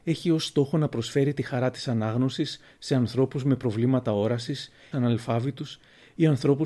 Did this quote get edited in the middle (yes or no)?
yes